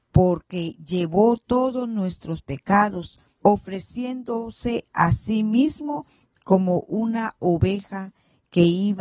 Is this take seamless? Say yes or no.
no